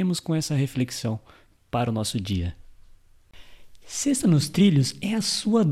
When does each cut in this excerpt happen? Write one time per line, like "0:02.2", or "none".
none